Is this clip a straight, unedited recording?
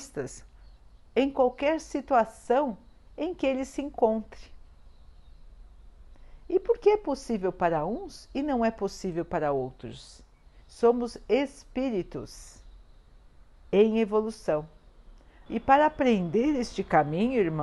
no; 2 cuts; at 10.6 s, 15.5 s

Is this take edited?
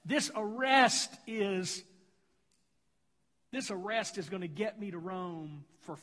no; 0 cuts

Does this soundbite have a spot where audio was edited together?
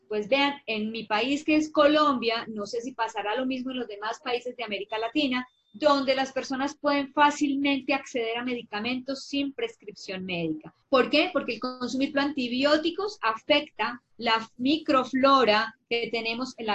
yes; 3 cuts; at 10.8 s, 12.1 s, 14.1 s

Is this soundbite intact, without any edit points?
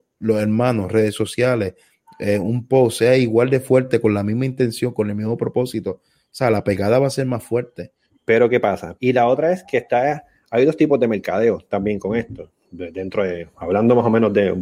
no; 1 cut; at 9.0 s

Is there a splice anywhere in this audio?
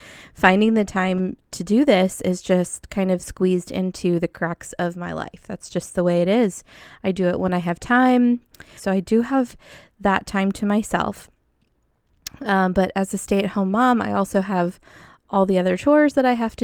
yes; 1 cut; at 8.8 s

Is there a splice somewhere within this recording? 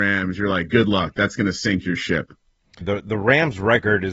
yes; 1 cut; at 2.8 s

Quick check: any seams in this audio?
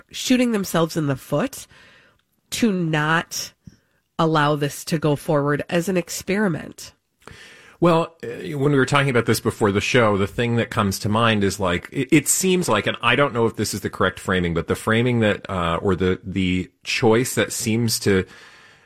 no; 0 cuts

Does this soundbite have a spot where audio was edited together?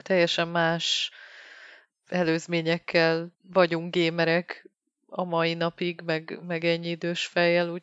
yes; 2 cuts; at 1.9 s, 3.4 s

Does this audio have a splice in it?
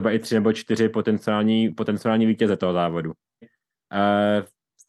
yes; 1 cut; at 3.4 s

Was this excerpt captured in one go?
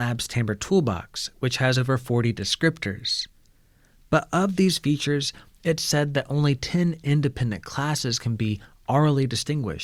yes; 0 cuts

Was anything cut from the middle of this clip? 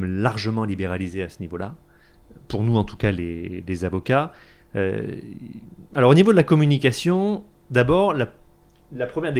no; 0 cuts

